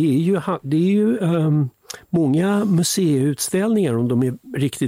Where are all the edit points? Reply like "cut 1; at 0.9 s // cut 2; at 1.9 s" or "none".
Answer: none